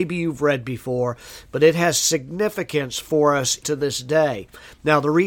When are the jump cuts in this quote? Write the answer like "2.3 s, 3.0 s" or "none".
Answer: 3.6 s